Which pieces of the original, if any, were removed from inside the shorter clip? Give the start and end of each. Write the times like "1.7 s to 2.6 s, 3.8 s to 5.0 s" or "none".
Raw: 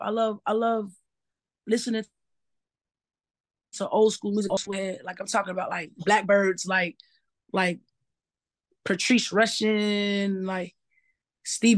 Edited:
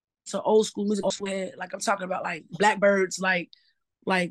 none